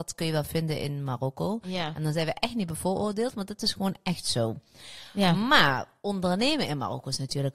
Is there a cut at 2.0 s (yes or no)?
no